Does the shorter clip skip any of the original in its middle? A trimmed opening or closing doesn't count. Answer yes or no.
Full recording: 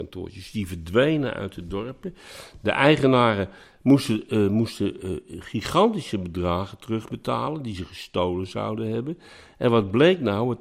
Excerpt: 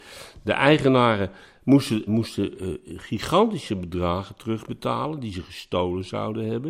yes